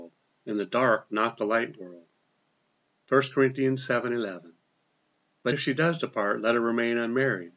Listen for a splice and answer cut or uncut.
cut